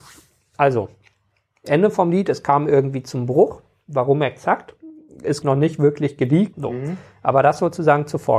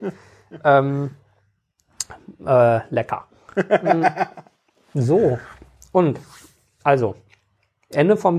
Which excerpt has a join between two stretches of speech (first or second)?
first